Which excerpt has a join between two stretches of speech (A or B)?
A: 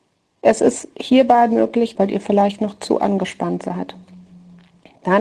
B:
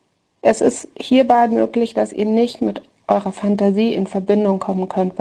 A